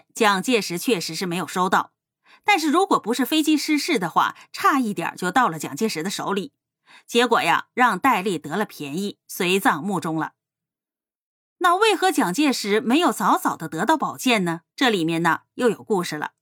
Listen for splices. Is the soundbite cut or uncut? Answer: cut